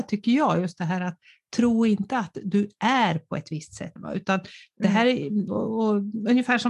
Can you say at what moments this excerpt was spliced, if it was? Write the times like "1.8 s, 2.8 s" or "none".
4.0 s, 5.5 s